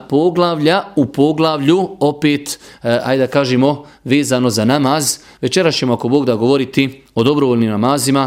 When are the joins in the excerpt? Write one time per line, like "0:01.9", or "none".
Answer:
none